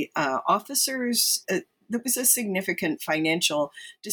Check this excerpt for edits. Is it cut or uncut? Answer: cut